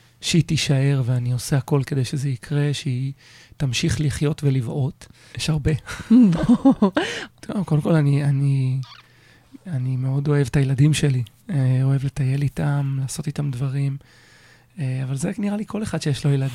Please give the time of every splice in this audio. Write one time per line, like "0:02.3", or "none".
0:05.3
0:07.3

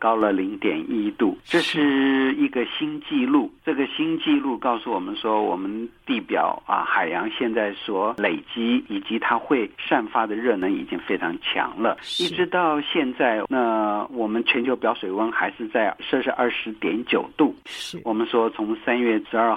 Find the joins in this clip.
0:13.5

